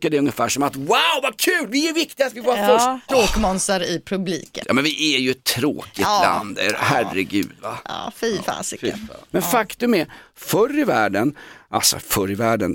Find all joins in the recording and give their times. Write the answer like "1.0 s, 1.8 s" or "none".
3.1 s, 4.6 s